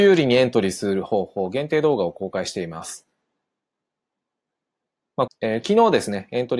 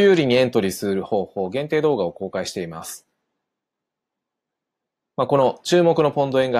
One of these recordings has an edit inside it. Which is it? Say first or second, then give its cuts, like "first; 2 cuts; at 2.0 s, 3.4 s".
first; 1 cut; at 5.3 s